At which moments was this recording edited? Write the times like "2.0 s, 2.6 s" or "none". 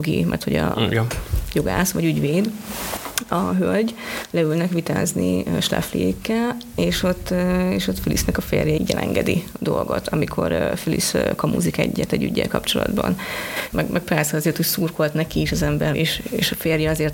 8.8 s, 13.7 s, 15.9 s